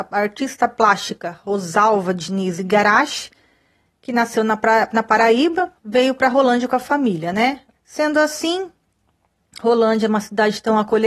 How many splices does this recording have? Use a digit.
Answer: 2